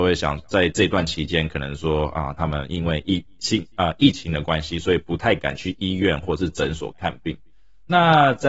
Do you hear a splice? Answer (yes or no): yes